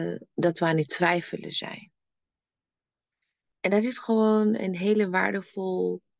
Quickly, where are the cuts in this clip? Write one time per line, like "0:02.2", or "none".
0:03.5